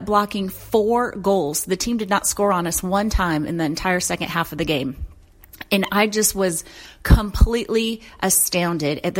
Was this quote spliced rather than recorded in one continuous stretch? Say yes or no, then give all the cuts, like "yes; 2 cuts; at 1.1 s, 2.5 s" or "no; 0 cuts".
no; 0 cuts